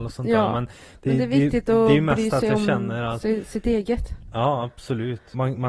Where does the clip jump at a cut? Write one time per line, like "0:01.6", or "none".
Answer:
none